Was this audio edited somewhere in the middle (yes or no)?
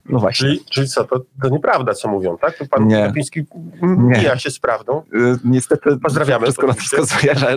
no